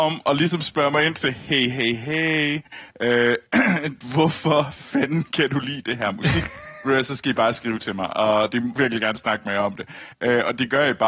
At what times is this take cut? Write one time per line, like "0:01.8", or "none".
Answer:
0:08.8